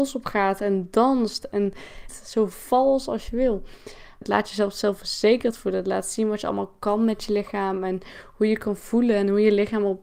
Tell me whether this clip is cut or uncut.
cut